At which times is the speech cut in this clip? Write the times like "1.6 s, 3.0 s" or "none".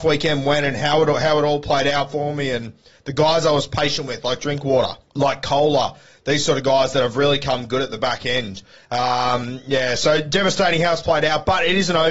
5.1 s